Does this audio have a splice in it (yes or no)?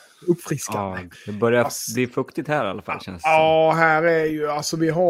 yes